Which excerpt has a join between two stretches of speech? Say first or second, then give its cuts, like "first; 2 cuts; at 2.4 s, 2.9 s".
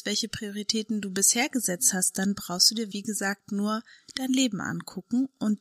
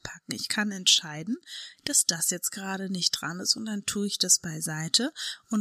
first; 1 cut; at 2.9 s